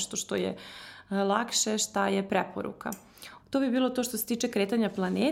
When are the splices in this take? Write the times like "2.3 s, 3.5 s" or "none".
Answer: 3.4 s